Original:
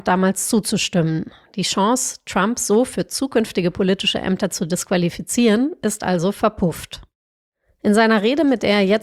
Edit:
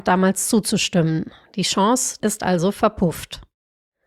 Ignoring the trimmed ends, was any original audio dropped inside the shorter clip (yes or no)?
yes